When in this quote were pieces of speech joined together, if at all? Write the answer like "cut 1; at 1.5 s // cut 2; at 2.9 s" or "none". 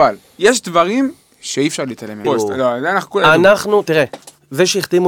cut 1; at 2.2 s